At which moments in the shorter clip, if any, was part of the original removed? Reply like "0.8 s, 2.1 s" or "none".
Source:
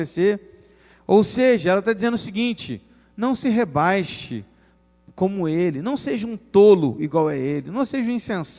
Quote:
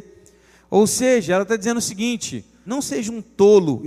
2.7 s